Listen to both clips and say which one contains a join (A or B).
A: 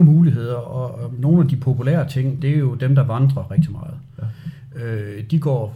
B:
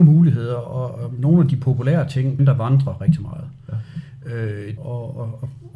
B